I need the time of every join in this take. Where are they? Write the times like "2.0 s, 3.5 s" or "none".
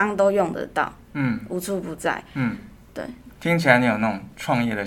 3.3 s